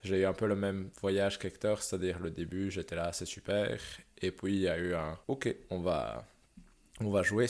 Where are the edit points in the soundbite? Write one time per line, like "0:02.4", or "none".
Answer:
0:05.2

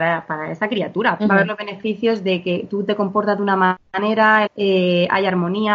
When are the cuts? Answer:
0:01.2
0:04.5

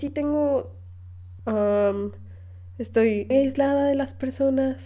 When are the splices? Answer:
0:01.4
0:03.3

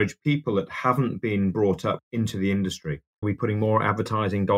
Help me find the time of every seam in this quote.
0:03.2

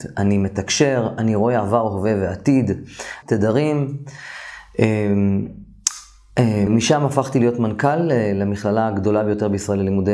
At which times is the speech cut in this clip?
0:03.2
0:06.7

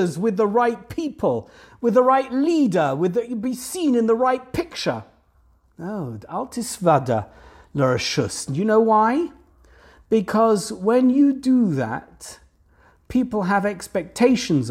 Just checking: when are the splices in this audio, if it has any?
0:08.5

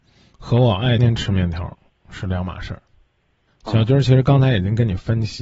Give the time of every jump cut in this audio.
0:01.0
0:03.5

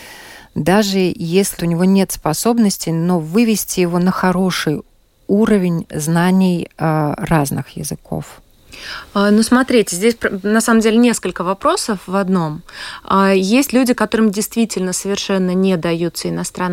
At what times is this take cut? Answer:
0:01.6

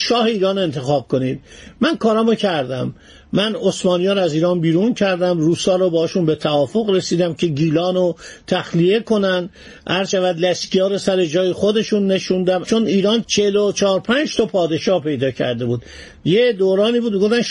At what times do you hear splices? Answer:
0:13.2

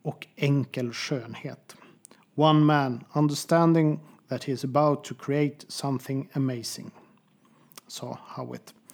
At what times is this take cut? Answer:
none

